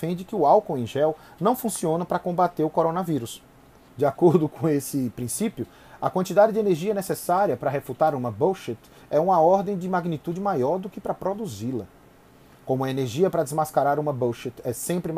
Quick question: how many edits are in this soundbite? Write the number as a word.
one